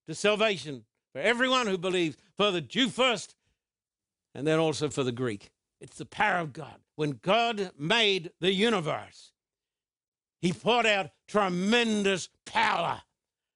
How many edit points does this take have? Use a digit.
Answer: 1